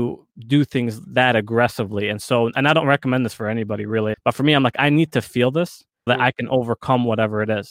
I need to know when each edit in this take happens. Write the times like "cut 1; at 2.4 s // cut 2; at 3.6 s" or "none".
cut 1; at 4.1 s // cut 2; at 6.1 s